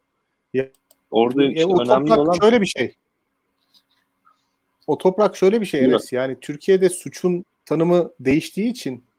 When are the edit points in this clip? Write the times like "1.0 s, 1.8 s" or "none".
1.1 s